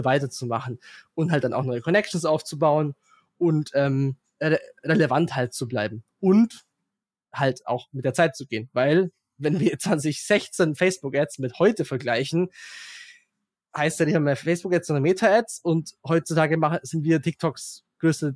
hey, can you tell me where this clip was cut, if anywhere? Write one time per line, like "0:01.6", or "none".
none